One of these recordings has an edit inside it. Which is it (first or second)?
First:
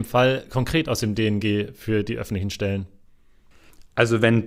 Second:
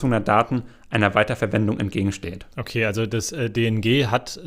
second